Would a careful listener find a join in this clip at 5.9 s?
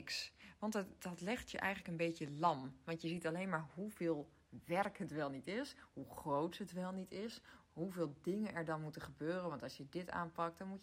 no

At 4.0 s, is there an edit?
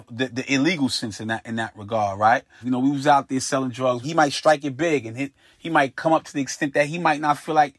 yes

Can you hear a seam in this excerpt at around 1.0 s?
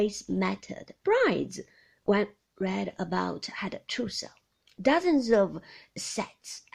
yes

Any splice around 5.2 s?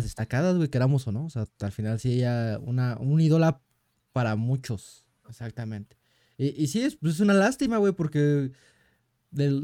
yes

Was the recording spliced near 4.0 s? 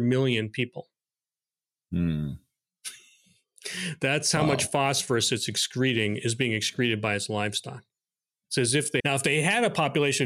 no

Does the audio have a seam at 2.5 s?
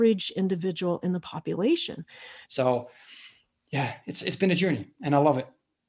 yes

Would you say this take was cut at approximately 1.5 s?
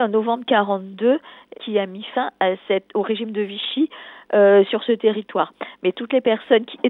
yes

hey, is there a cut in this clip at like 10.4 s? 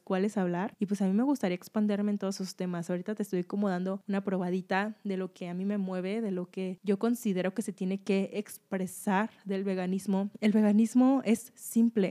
yes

